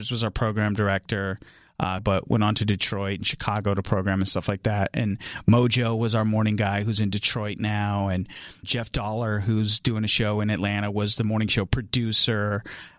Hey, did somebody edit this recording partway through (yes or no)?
yes